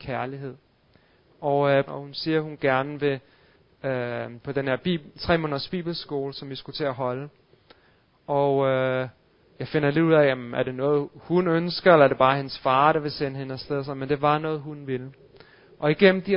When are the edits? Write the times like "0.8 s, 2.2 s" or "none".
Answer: 1.9 s, 4.4 s